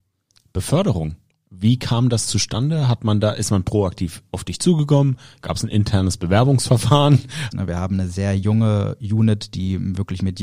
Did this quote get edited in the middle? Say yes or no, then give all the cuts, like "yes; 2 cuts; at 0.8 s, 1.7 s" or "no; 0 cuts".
yes; 1 cut; at 7.5 s